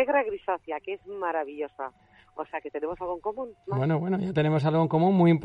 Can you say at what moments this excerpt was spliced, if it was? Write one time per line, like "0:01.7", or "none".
none